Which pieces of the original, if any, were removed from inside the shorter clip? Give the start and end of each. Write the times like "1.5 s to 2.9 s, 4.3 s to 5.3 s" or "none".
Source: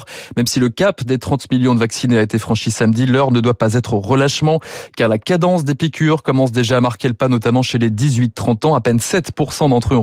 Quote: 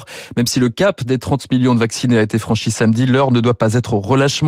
none